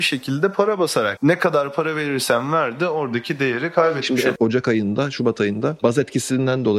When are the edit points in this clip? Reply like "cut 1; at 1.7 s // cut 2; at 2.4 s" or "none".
cut 1; at 1.2 s // cut 2; at 4.4 s